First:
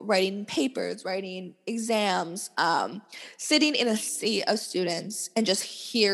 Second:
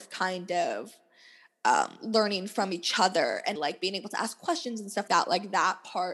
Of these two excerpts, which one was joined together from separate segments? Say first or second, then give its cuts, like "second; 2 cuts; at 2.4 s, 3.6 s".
second; 2 cuts; at 3.6 s, 5.1 s